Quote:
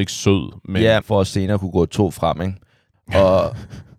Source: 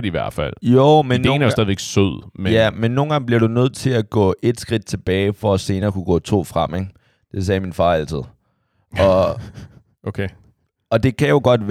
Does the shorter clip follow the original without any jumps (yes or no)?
no